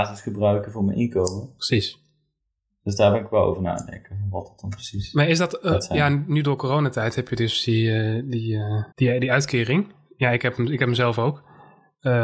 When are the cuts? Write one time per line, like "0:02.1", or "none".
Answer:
0:08.9